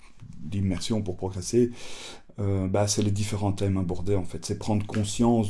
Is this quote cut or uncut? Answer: uncut